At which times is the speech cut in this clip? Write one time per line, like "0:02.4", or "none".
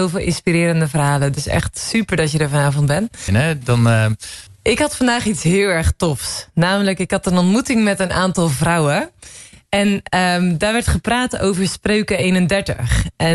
0:03.3
0:04.5